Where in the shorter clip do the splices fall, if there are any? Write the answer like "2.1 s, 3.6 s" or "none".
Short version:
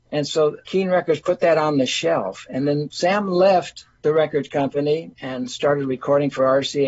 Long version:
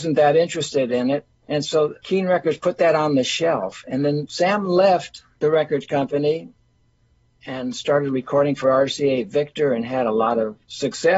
5.1 s

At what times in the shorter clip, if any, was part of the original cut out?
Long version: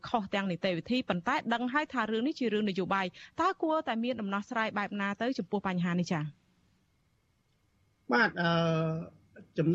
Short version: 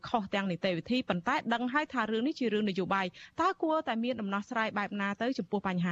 none

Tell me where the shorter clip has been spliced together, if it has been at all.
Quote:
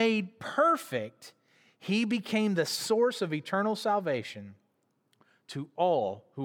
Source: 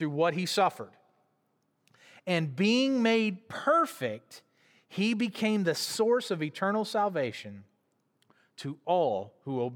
none

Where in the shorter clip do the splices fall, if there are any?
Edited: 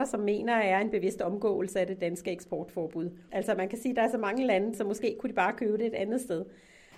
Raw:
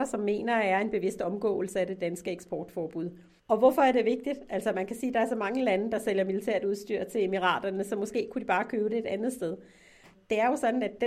3.3 s, 4.7 s

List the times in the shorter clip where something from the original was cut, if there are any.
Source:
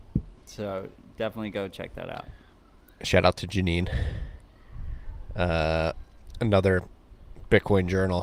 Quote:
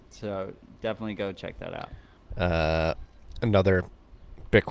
2.3 s

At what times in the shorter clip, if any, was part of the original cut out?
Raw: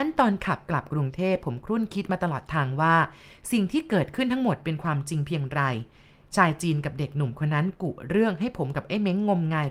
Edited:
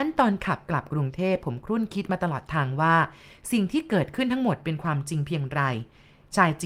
none

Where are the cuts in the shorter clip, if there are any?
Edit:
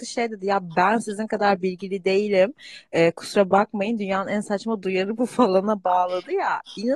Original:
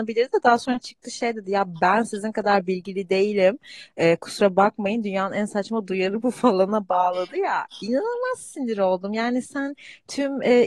none

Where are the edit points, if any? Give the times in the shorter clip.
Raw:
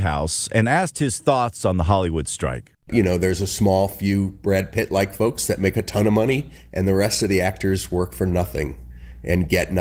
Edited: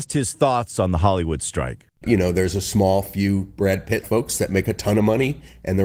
4.0 s

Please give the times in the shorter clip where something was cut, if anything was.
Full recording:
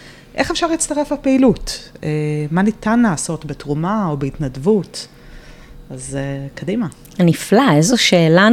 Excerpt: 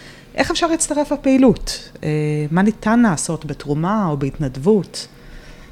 none

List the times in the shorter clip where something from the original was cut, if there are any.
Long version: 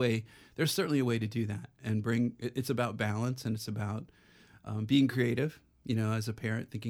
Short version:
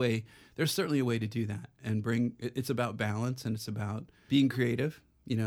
4.3 s

